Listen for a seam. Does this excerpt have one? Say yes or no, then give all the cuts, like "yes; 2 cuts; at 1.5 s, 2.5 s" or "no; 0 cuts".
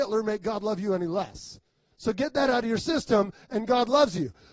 no; 0 cuts